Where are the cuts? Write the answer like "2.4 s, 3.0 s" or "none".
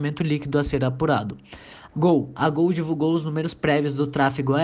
1.9 s